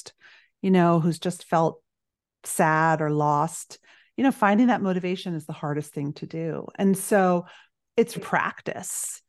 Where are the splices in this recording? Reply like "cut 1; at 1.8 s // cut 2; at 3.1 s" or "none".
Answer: cut 1; at 8.2 s

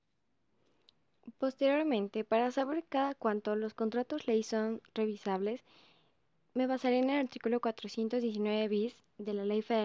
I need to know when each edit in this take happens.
none

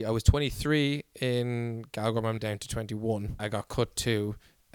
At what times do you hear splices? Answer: cut 1; at 2.4 s // cut 2; at 3.4 s

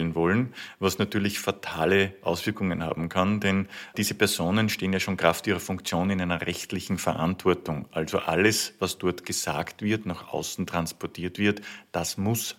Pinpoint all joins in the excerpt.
cut 1; at 3.9 s

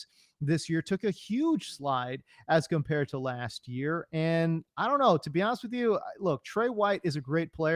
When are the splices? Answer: none

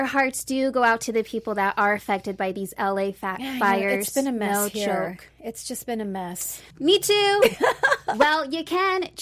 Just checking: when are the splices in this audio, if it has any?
cut 1; at 6.7 s

